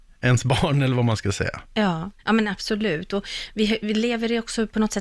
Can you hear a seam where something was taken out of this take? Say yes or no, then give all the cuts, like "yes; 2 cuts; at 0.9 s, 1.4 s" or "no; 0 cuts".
yes; 1 cut; at 2.2 s